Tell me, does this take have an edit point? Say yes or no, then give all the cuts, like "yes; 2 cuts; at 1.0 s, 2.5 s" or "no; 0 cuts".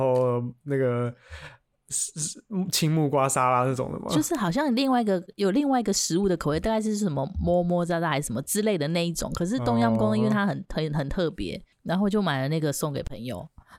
yes; 1 cut; at 11.7 s